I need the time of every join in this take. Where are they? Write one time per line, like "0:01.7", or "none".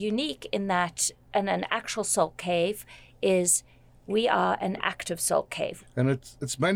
0:05.8